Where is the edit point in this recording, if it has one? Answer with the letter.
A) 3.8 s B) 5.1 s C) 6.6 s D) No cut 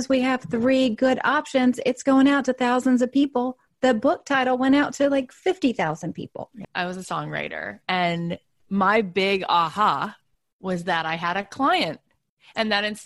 C